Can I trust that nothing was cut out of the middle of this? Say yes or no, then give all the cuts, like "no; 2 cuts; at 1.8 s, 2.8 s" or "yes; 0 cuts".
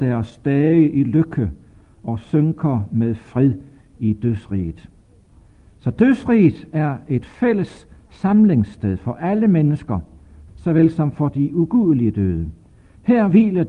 no; 1 cut; at 10.5 s